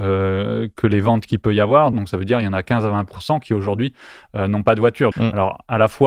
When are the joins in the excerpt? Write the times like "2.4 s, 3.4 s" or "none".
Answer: 1.9 s, 5.1 s